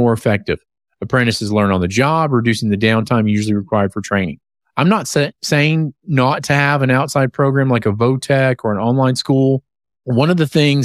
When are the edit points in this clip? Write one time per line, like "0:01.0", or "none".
0:09.9